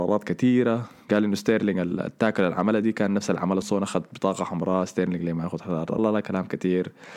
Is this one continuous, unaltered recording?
no; 2 cuts; at 3.6 s, 6.0 s

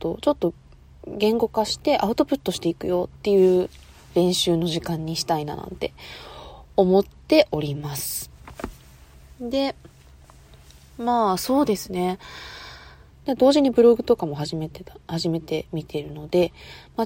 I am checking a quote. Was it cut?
yes; 1 cut; at 13.1 s

